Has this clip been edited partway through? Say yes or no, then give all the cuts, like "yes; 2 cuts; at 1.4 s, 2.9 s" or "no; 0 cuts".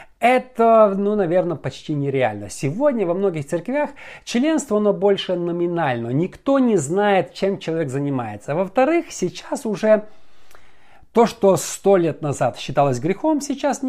no; 0 cuts